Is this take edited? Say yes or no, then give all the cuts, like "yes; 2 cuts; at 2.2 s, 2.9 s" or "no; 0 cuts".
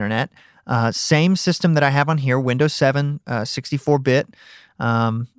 no; 0 cuts